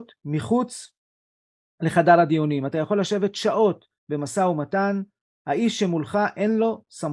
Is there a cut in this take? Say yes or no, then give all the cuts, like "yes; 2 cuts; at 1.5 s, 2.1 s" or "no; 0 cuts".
no; 0 cuts